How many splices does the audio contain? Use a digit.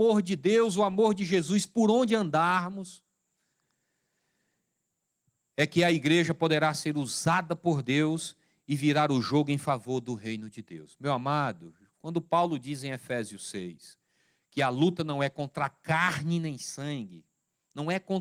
0